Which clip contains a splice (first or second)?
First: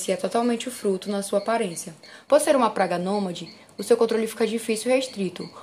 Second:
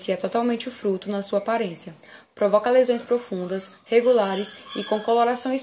first